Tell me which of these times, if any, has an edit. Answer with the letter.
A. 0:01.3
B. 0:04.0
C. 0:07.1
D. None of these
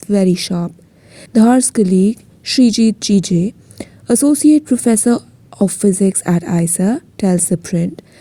A